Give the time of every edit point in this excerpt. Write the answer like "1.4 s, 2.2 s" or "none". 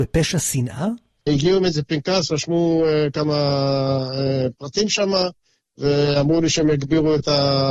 1.3 s